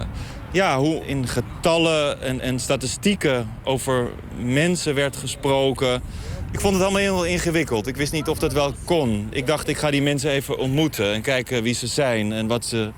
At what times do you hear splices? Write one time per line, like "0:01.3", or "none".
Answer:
0:01.0